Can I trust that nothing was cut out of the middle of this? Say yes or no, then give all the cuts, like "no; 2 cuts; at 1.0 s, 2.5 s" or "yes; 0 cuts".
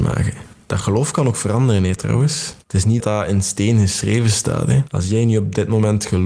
no; 1 cut; at 3.0 s